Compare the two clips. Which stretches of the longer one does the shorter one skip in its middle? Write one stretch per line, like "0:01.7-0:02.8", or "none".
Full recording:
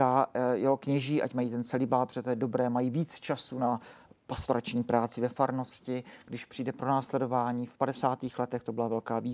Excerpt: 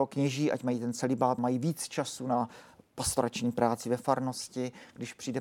0:02.1-0:02.7